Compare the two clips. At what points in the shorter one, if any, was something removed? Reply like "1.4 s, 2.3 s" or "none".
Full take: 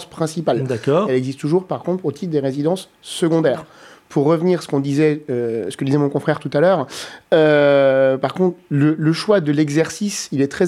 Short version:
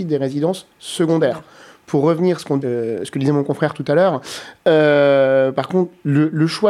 2.6 s